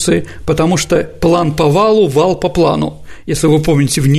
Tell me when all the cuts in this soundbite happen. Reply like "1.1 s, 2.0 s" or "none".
none